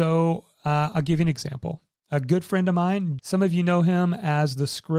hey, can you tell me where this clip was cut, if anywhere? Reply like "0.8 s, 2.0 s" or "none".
3.2 s